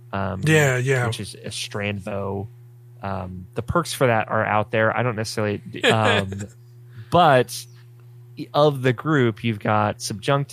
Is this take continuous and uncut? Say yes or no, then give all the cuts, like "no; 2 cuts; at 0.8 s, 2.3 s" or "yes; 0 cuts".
no; 1 cut; at 5.8 s